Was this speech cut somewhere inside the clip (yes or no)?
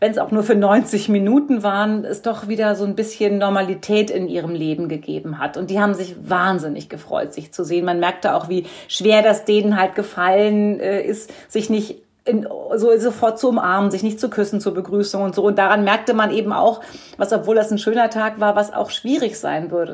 no